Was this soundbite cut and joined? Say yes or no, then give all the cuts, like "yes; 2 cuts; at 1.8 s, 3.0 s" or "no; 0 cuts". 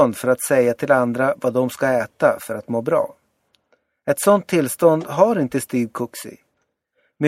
no; 0 cuts